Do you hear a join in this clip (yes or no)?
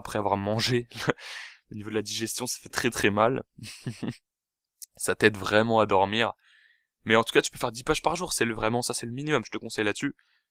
yes